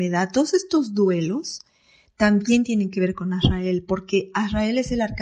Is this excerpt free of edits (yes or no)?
yes